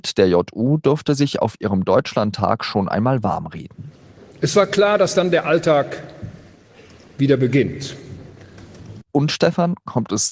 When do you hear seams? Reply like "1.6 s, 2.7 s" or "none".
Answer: 9.0 s